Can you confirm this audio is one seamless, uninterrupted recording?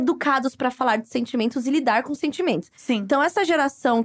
yes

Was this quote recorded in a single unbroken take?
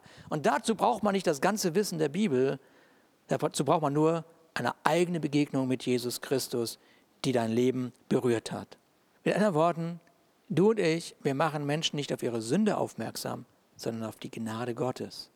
no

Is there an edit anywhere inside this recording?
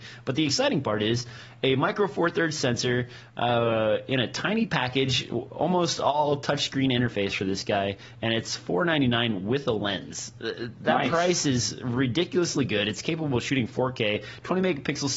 no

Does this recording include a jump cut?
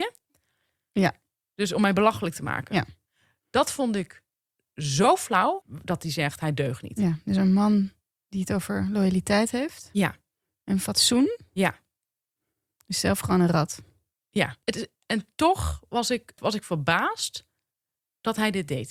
yes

